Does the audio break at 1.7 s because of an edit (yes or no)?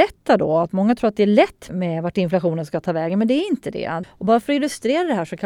yes